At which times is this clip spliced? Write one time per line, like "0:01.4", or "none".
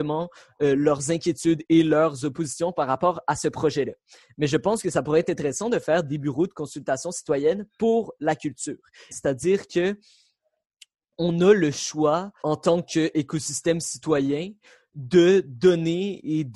0:09.1
0:12.4